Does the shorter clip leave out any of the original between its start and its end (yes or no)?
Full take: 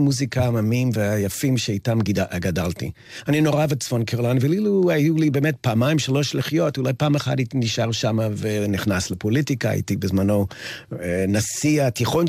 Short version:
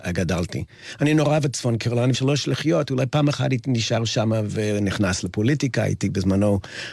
yes